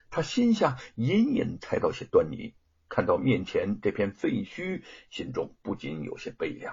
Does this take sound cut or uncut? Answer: uncut